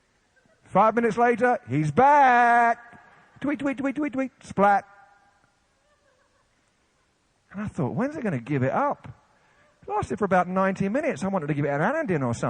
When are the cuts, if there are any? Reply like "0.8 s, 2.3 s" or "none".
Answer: none